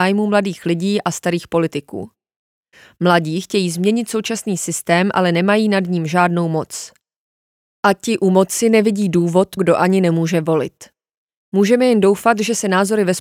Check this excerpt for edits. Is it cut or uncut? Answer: cut